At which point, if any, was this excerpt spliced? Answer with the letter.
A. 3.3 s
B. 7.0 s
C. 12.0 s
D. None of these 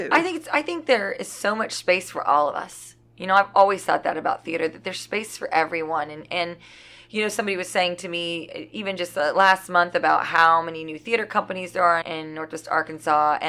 C